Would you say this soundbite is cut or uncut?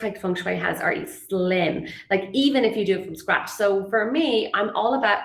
uncut